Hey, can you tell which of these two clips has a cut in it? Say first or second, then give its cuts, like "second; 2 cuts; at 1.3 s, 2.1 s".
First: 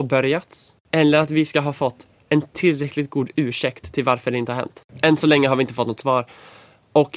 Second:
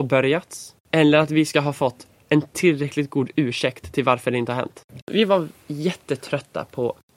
second; 1 cut; at 5.0 s